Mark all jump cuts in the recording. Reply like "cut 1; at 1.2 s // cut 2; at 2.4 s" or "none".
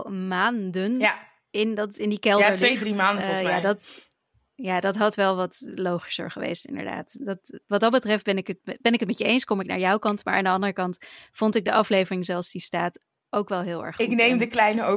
none